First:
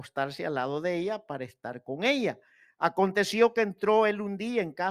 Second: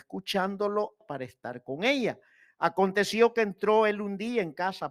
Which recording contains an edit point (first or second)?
second